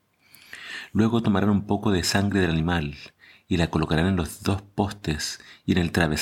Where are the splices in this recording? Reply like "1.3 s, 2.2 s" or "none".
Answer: none